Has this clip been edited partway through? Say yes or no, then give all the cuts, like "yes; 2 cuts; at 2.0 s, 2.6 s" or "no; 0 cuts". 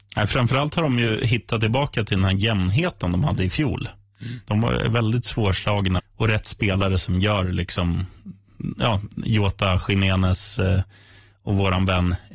yes; 1 cut; at 6.0 s